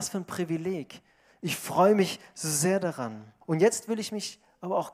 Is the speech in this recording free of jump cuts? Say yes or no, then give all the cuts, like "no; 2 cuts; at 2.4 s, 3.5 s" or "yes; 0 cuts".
no; 1 cut; at 3.4 s